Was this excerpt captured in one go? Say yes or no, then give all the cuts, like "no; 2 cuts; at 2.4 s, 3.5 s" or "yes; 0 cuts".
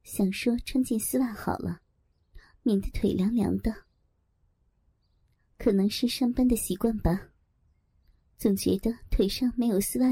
yes; 0 cuts